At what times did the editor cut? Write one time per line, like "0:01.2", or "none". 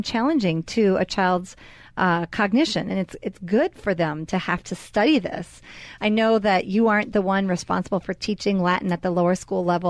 0:06.0